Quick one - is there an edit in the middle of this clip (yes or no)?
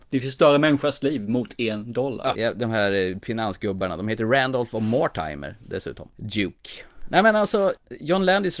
yes